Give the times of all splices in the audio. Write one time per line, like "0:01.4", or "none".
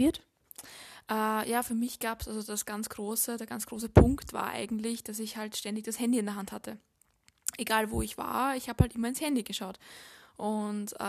none